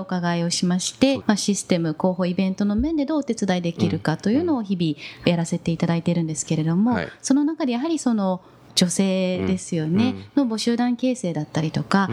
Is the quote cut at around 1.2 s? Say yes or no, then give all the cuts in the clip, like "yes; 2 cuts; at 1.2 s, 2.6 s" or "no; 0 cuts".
yes; 1 cut; at 1.2 s